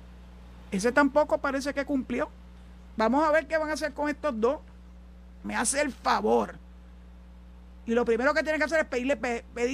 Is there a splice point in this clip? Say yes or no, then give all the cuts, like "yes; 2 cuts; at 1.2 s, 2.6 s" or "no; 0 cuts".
yes; 1 cut; at 5.4 s